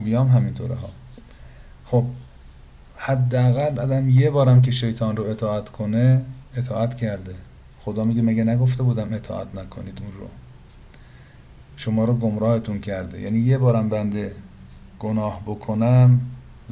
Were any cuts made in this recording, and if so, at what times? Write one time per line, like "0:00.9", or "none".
0:06.5